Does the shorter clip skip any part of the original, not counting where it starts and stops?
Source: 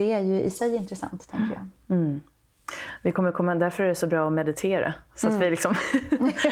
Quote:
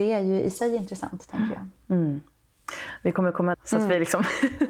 yes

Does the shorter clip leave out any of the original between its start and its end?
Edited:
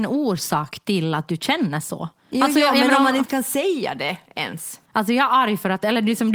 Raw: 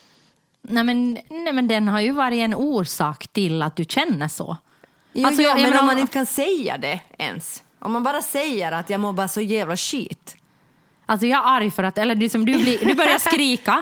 yes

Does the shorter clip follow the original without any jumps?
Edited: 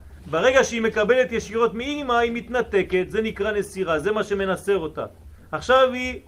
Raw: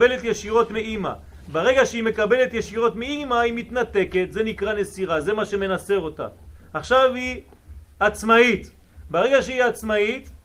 yes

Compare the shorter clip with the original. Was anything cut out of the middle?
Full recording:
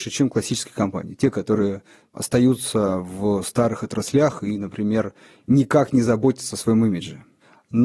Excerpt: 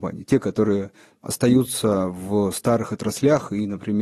no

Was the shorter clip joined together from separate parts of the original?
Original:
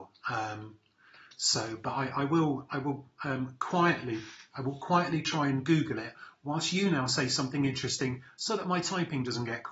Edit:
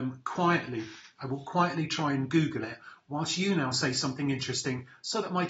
no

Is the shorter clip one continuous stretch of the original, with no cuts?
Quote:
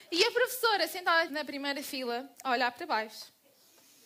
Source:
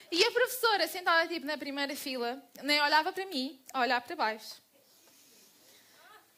no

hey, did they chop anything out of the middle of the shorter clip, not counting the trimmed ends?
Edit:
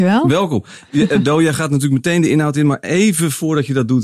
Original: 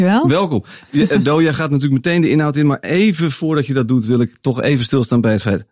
no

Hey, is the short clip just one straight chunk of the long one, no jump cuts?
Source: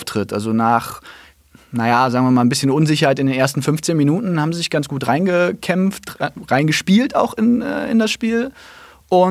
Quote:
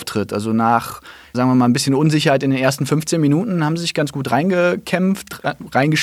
no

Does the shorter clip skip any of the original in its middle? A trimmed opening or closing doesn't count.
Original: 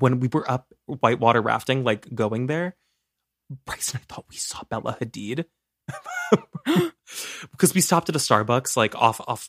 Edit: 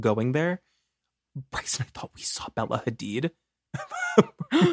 no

